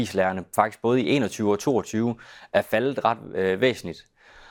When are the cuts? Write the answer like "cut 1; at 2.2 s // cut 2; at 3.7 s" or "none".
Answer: none